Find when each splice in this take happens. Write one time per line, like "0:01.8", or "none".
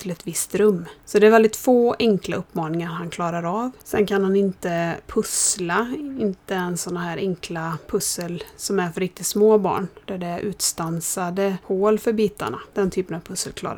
none